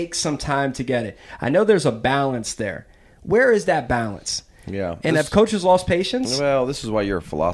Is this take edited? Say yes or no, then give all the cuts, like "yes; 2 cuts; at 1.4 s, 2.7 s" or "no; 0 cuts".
no; 0 cuts